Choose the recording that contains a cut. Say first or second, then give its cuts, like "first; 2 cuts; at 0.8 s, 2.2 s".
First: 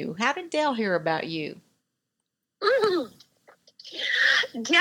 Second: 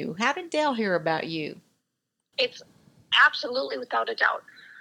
second; 1 cut; at 2.3 s